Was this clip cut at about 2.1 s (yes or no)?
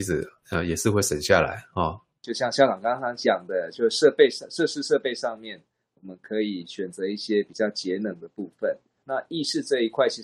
no